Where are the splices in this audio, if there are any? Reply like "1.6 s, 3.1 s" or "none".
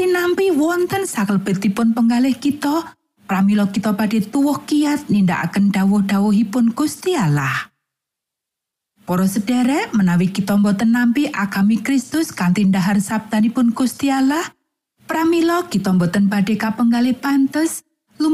none